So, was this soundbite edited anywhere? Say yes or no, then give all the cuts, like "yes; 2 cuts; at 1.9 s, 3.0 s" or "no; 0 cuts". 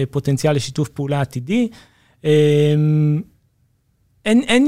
no; 0 cuts